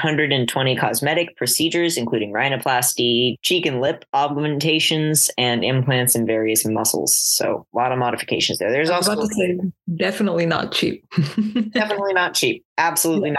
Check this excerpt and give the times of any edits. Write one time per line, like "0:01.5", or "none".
none